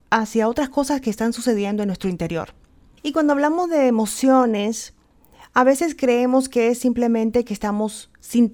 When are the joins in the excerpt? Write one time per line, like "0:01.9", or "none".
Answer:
0:03.0